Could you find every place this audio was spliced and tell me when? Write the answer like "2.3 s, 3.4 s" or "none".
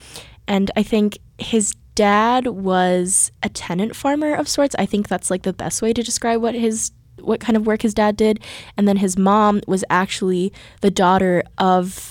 none